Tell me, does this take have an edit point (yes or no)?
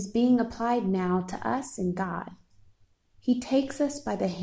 no